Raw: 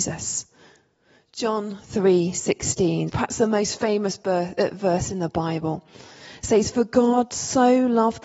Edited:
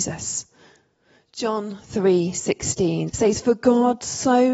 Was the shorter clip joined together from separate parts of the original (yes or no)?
yes